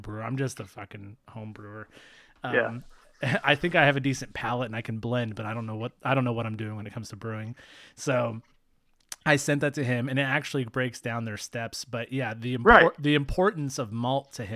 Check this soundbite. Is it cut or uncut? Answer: uncut